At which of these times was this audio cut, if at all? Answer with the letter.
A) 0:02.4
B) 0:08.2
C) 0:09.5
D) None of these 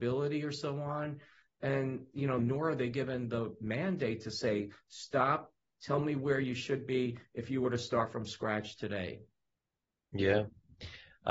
A